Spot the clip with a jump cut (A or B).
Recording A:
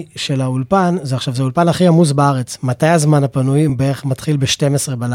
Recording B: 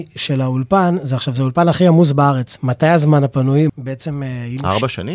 B